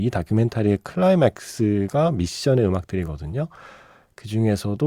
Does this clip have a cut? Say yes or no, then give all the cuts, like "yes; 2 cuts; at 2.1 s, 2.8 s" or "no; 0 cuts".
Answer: no; 0 cuts